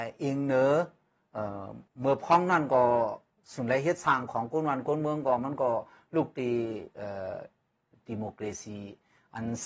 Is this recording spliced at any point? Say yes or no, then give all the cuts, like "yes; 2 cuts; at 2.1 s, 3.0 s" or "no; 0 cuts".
yes; 1 cut; at 1.9 s